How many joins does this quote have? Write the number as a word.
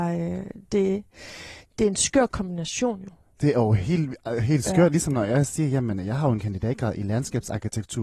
zero